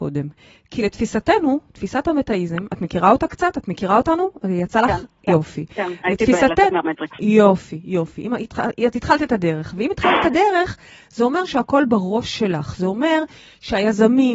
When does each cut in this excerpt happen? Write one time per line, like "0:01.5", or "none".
none